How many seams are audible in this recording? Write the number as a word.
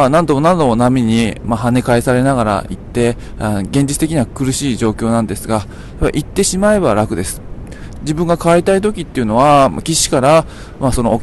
one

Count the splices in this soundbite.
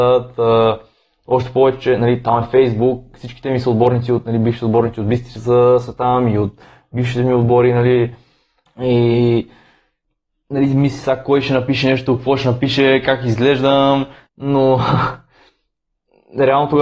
one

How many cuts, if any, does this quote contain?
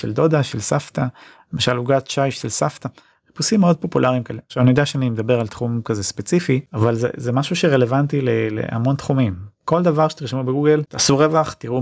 zero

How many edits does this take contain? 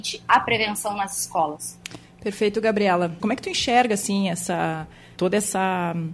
two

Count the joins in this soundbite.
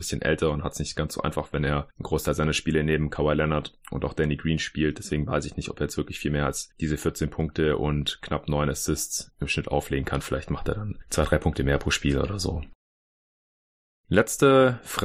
zero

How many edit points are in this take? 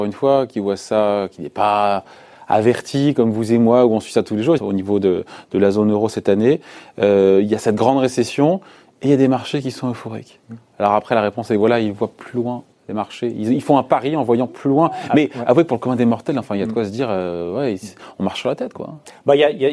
one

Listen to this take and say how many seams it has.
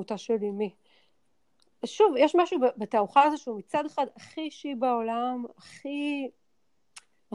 zero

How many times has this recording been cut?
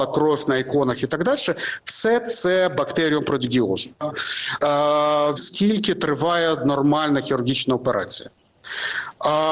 two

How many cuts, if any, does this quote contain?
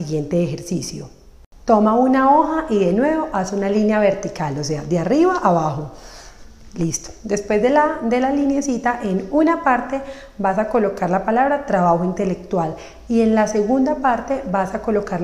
zero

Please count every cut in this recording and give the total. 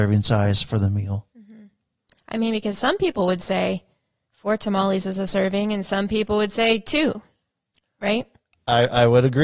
zero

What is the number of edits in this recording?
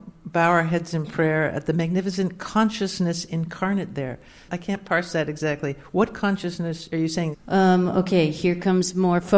one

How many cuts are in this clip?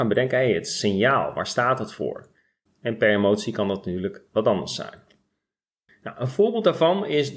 one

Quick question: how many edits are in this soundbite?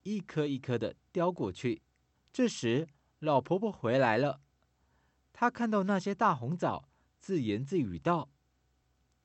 one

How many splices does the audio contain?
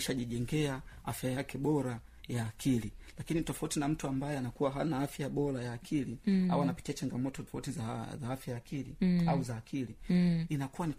one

